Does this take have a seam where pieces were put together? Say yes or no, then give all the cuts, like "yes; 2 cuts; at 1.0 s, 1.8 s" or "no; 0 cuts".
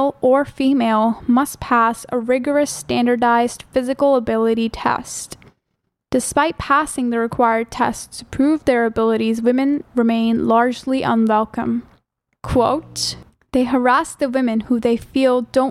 no; 0 cuts